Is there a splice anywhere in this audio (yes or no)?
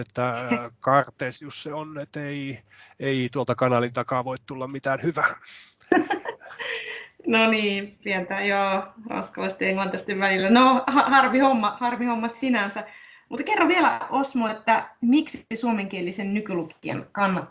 no